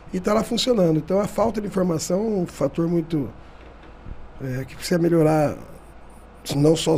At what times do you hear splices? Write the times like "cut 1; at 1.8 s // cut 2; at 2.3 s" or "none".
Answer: none